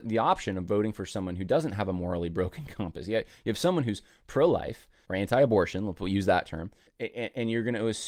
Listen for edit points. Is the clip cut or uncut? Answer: cut